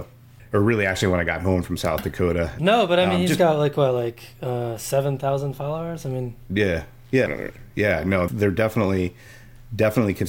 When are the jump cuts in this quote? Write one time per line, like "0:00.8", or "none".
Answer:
0:02.6
0:07.3
0:08.3